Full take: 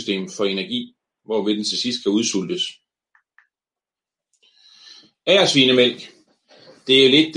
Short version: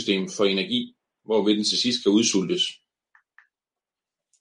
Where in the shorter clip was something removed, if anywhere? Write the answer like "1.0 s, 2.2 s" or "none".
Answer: none